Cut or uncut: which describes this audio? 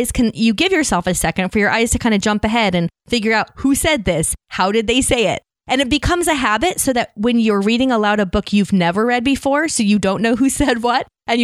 uncut